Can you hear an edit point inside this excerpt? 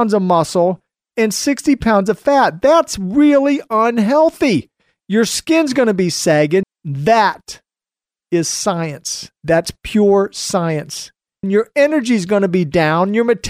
yes; 2 cuts; at 6.6 s, 11.4 s

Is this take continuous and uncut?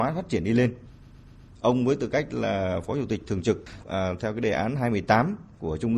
no; 1 cut; at 3.8 s

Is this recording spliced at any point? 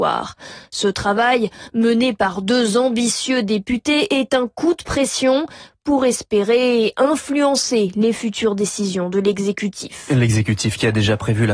no; 0 cuts

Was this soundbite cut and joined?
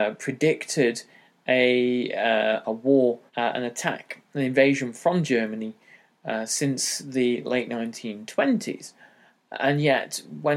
yes; 1 cut; at 3.3 s

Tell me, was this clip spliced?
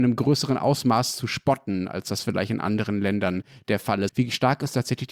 yes; 1 cut; at 4.1 s

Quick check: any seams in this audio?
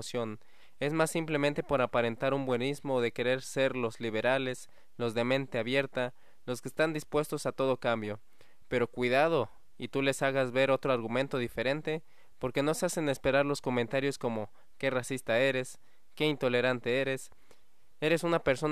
no; 0 cuts

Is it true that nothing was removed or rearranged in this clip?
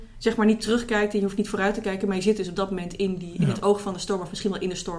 yes; 0 cuts

